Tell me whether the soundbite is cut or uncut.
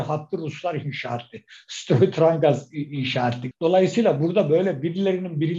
cut